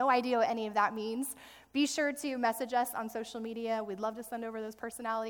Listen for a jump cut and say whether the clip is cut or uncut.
uncut